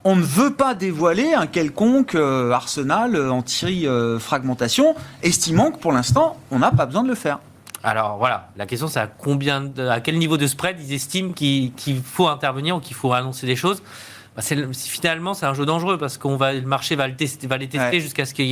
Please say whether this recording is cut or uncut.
uncut